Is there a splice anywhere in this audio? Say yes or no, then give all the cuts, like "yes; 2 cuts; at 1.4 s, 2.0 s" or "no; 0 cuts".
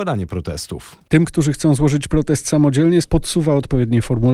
yes; 1 cut; at 3.0 s